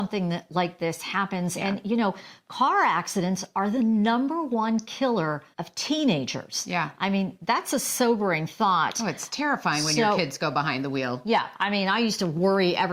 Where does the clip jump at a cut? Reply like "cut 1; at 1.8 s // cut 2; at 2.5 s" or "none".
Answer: cut 1; at 5.5 s